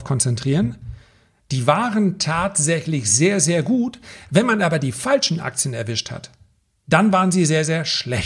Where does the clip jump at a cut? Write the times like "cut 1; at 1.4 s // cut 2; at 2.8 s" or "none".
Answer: none